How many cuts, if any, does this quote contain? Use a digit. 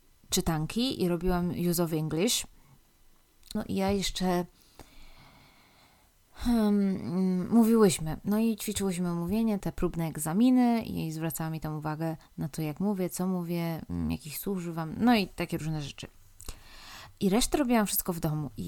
3